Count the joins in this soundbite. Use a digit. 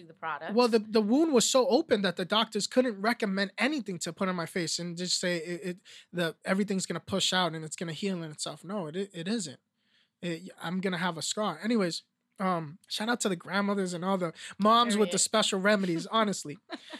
1